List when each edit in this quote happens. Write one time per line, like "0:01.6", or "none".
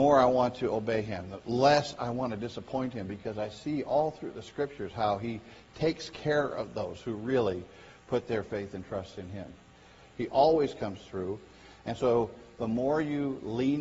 0:10.1